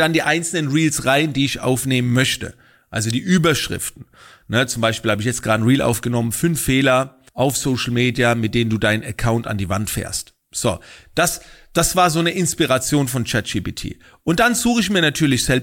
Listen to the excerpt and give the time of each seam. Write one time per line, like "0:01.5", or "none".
0:07.3